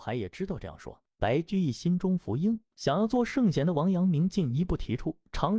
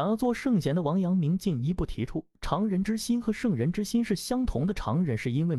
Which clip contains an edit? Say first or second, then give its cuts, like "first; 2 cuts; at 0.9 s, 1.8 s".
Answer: first; 2 cuts; at 1.1 s, 2.7 s